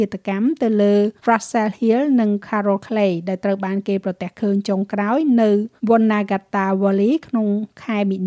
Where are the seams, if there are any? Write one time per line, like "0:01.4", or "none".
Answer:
0:01.2
0:05.8